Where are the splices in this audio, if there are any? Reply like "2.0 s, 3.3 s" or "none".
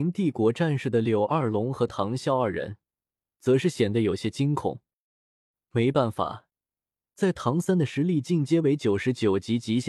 none